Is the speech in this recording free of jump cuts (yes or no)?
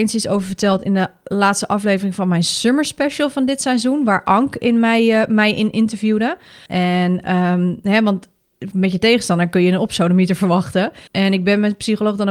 no